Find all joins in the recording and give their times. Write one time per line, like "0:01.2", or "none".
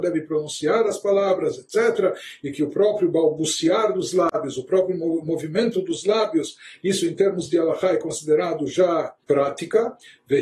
0:06.8
0:09.2